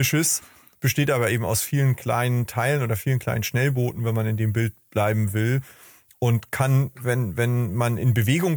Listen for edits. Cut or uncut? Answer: uncut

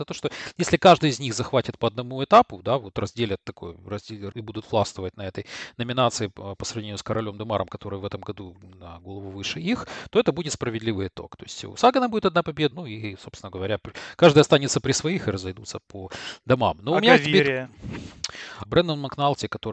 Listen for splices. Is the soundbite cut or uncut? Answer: cut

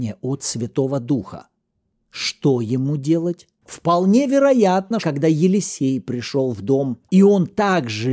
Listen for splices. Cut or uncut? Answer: cut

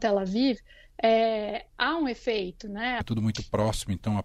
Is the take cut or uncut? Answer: cut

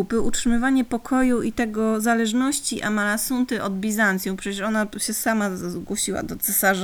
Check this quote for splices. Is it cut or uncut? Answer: uncut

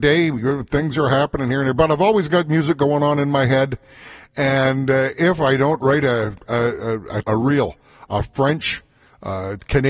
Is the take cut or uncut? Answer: cut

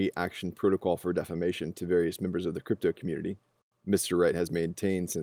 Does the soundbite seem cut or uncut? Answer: uncut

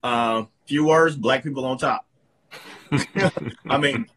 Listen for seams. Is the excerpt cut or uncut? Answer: uncut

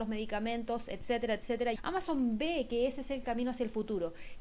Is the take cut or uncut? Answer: cut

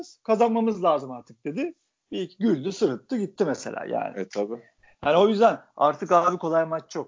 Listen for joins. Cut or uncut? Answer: uncut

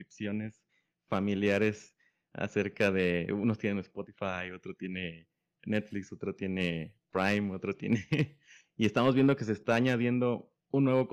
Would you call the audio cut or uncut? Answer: uncut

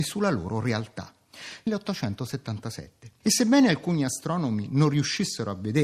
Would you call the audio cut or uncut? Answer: cut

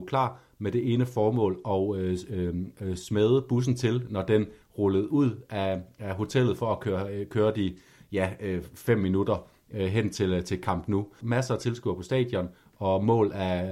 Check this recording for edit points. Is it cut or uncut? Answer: cut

